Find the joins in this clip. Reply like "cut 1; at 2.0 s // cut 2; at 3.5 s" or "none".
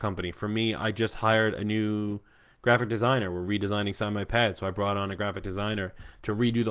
none